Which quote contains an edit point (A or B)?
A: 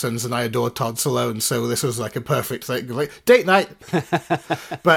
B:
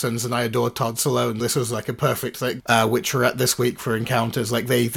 B